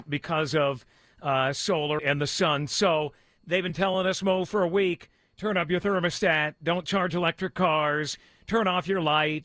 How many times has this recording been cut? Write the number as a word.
one